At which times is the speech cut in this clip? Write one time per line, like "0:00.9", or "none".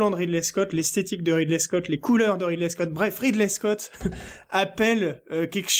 none